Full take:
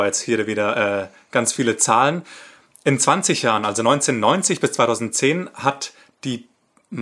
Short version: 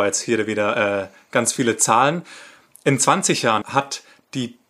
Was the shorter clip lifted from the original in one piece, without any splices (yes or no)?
no